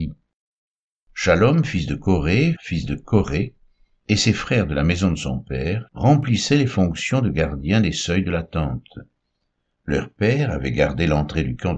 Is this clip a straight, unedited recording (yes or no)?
no